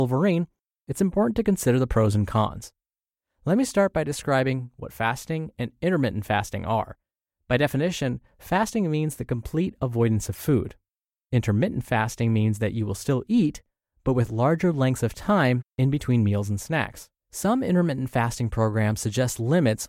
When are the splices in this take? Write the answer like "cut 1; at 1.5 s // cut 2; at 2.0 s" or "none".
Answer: cut 1; at 17.2 s